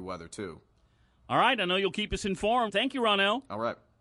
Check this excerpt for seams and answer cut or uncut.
cut